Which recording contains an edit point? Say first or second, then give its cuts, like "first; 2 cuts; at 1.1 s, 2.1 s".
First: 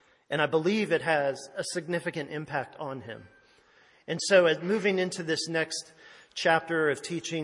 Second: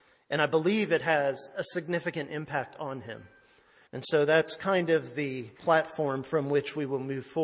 second; 2 cuts; at 3.9 s, 5.6 s